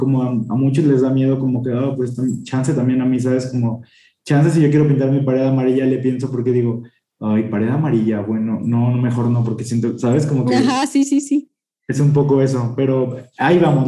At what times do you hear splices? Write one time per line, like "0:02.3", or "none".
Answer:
none